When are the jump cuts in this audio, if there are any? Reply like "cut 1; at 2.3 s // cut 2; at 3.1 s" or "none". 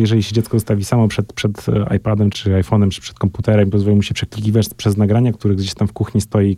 cut 1; at 2.3 s // cut 2; at 5.3 s